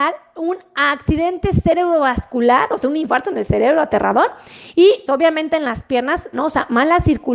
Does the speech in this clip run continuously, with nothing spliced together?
no; 2 cuts; at 5.1 s, 6.3 s

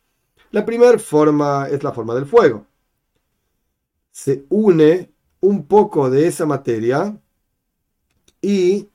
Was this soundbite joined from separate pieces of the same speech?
no; 0 cuts

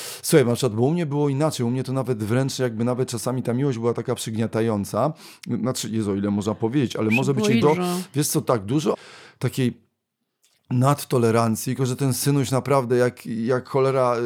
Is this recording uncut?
no; 3 cuts; at 7.6 s, 8.9 s, 11.8 s

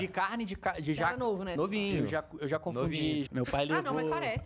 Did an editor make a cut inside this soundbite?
yes; 2 cuts; at 1.6 s, 3.3 s

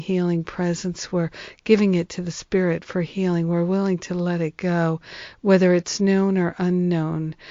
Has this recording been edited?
no; 0 cuts

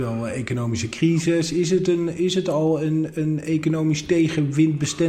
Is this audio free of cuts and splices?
yes; 0 cuts

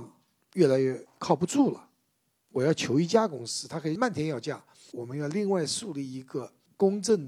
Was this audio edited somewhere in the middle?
yes; 1 cut; at 4.9 s

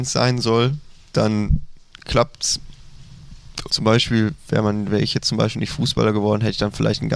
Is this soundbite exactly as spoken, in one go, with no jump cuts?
no; 1 cut; at 3.7 s

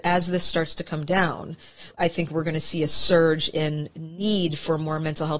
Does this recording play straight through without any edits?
no; 1 cut; at 1.9 s

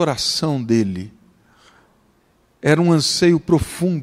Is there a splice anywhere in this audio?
no; 0 cuts

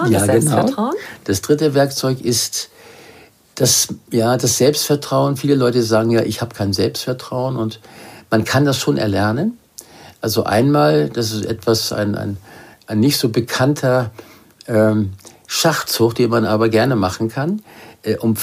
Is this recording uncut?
yes; 0 cuts

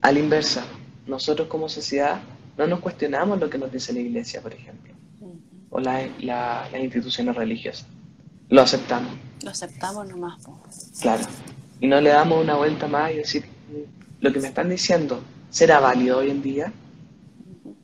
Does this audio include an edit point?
no; 0 cuts

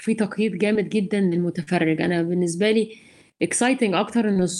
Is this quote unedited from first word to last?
yes; 0 cuts

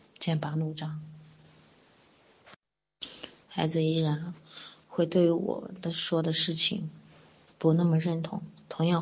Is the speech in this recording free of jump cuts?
no; 1 cut; at 3.4 s

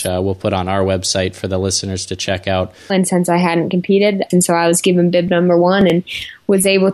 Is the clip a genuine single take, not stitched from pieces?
no; 2 cuts; at 2.9 s, 4.3 s

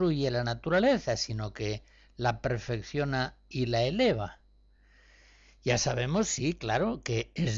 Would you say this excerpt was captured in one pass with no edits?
yes; 0 cuts

